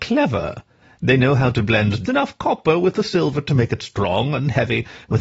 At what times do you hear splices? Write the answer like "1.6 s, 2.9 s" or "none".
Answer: 2.1 s